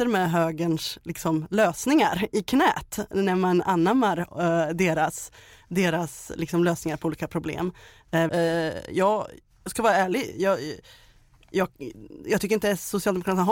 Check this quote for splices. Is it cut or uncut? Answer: cut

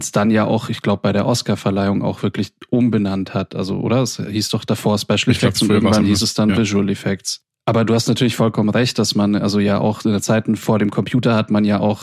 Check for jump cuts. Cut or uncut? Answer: uncut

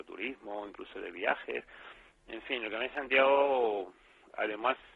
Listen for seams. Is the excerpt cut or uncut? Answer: uncut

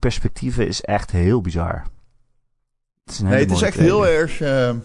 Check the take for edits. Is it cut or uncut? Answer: uncut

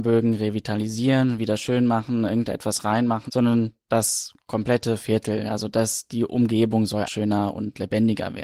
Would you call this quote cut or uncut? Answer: cut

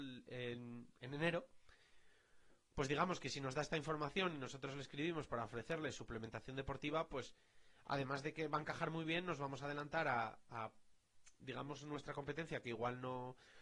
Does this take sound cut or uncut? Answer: uncut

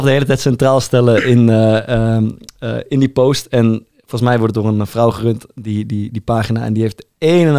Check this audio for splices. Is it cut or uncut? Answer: uncut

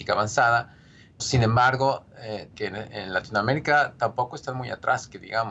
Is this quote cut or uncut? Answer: cut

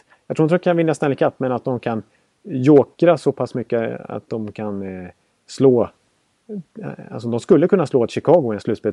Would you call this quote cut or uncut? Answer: uncut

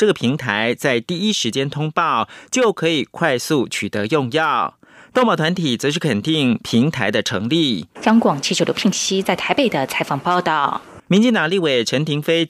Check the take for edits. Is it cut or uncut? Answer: cut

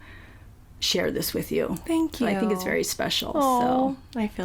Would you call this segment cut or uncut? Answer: uncut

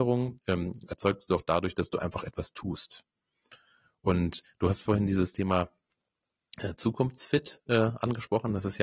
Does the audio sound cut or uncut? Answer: uncut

